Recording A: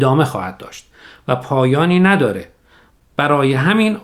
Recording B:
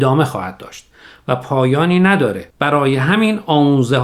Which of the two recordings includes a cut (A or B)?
B